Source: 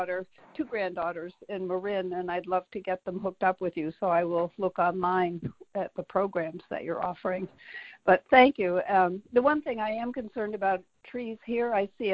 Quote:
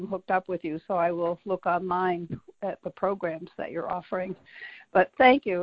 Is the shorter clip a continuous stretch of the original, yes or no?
yes